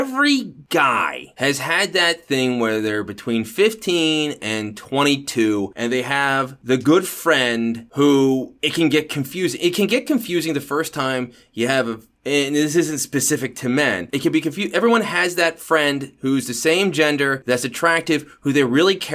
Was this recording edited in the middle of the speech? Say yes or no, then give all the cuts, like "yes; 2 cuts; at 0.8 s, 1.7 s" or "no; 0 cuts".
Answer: no; 0 cuts